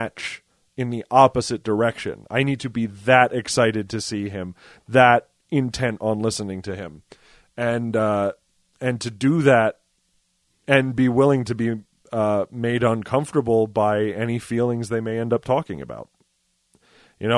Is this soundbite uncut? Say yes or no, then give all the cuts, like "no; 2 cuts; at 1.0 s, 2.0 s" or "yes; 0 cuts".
yes; 0 cuts